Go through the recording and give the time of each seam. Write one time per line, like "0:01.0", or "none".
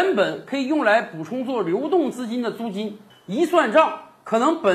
0:03.1